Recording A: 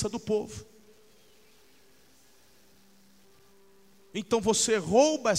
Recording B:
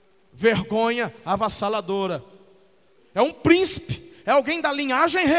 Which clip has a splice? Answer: B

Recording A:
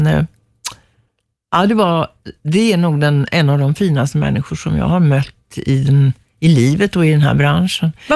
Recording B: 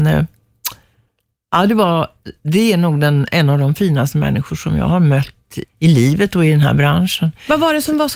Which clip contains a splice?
B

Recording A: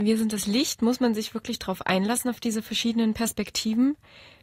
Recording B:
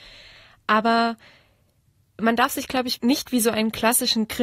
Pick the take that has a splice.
B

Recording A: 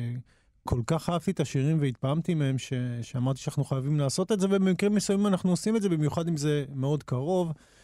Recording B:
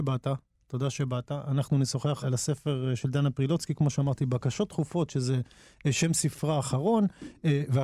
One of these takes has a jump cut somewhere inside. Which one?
B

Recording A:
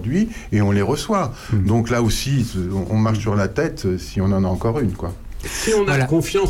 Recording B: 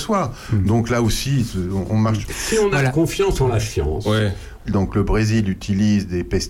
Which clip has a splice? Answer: B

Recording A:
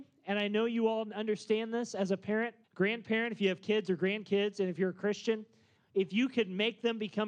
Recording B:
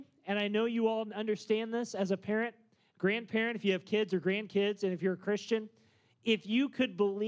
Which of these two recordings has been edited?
A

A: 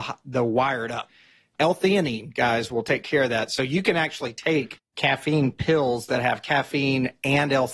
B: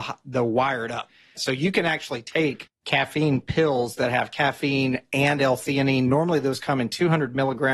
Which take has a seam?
B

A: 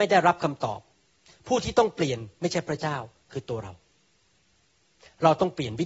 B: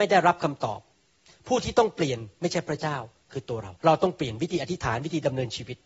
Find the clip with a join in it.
B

